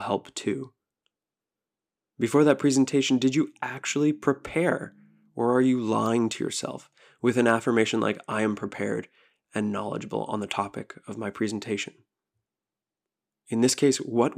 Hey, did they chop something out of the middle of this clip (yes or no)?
no